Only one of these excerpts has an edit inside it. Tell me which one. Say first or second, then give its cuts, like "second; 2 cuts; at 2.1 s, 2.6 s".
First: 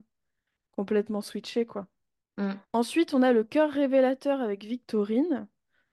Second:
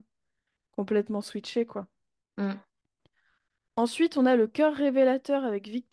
first; 1 cut; at 2.6 s